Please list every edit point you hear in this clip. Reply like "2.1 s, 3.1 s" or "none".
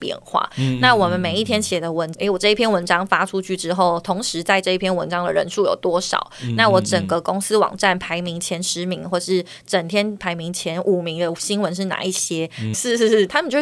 2.1 s, 12.7 s